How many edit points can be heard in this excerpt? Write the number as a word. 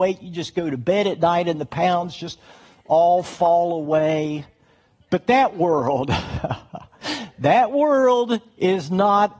zero